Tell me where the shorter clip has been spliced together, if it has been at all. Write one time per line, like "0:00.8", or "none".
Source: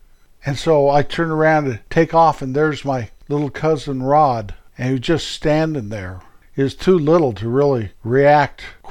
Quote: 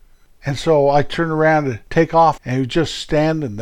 0:02.4